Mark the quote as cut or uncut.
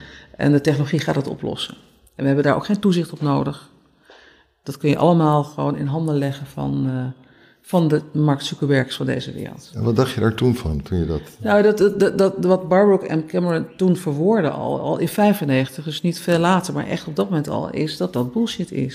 uncut